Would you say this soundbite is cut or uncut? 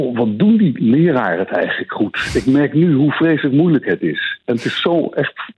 uncut